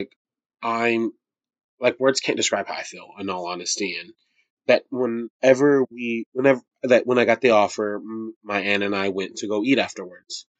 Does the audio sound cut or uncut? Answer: uncut